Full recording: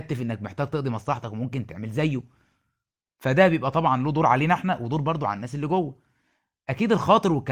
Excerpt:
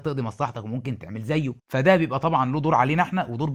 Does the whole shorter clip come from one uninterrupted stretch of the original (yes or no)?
no